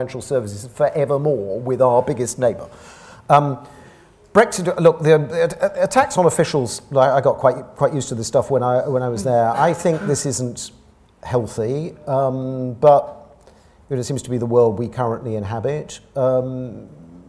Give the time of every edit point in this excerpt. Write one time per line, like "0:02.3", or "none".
none

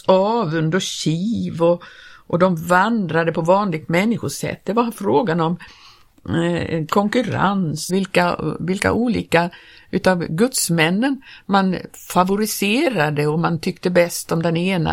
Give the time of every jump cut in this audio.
0:07.9

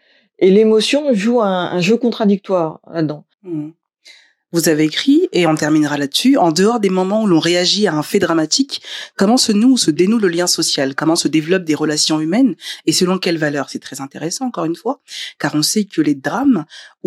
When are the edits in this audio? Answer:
0:03.3

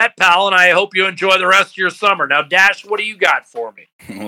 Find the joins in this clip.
none

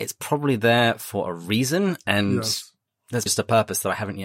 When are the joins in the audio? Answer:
0:03.3

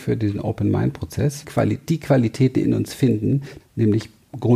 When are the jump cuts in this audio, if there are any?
0:01.4
0:03.6

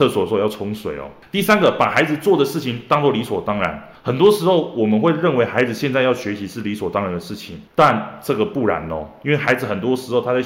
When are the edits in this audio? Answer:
none

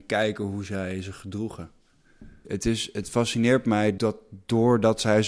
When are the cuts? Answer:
0:02.4
0:04.0

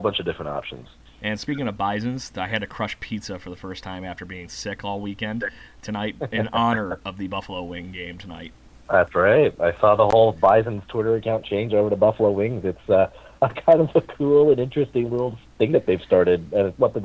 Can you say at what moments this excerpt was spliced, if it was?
0:01.1

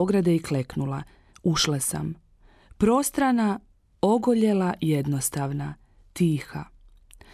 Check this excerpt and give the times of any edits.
0:01.3

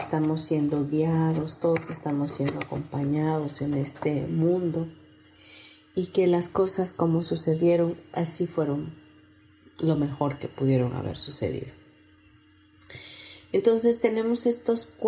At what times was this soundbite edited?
none

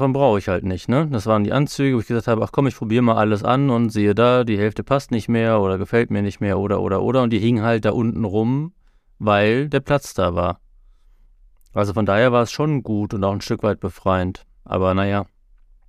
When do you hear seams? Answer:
none

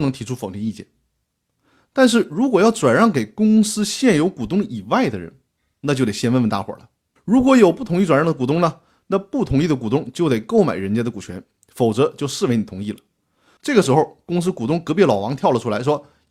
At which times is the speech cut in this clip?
0:07.2
0:13.6

